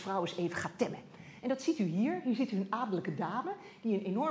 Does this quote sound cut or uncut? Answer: uncut